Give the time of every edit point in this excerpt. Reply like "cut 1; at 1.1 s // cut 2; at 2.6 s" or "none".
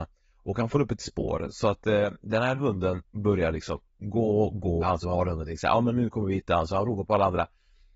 cut 1; at 4.8 s